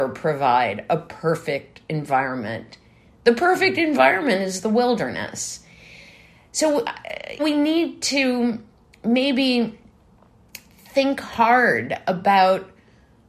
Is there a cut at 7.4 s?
yes; 1 cut; at 7.4 s

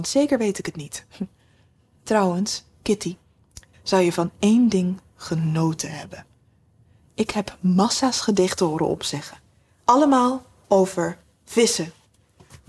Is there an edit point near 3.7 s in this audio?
yes; 1 cut; at 3.7 s

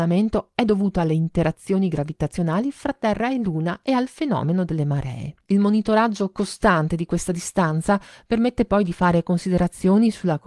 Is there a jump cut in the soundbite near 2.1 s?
no; 1 cut; at 5.4 s

